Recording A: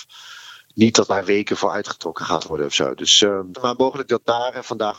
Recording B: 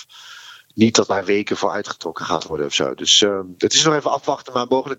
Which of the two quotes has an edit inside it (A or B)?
A